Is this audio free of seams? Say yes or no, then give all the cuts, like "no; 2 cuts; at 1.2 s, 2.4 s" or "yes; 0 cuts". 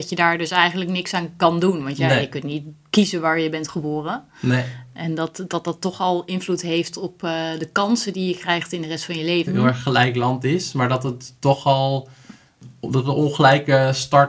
no; 1 cut; at 9.5 s